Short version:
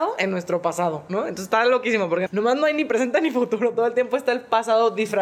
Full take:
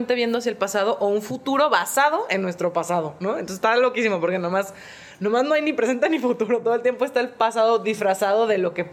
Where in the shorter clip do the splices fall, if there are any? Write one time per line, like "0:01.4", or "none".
0:02.3